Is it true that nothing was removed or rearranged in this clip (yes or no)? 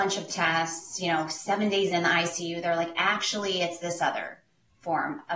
no